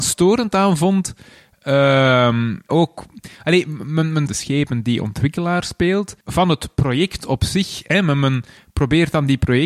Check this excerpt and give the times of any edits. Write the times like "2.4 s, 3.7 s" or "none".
2.7 s, 4.3 s, 6.2 s

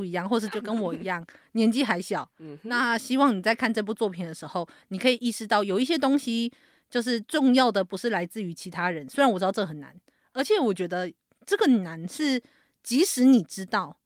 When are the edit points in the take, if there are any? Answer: none

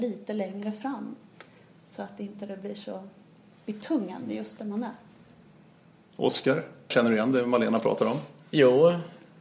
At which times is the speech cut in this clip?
6.9 s

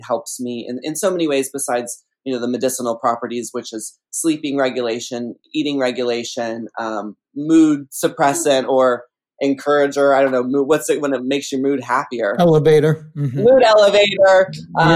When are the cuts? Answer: none

